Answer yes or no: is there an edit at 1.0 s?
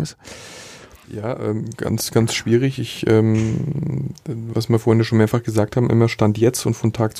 yes